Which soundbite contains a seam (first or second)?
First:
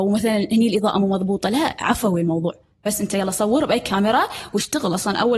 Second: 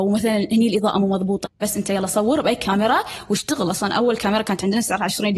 second